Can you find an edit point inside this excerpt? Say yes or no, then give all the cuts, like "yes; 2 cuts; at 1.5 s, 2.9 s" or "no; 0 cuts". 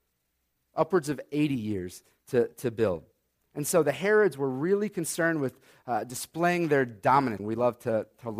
yes; 1 cut; at 7.4 s